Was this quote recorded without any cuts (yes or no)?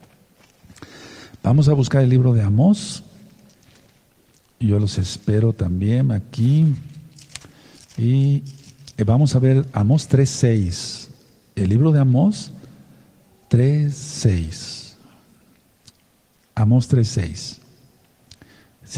yes